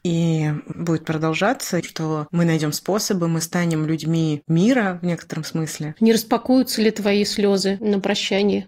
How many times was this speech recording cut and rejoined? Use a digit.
2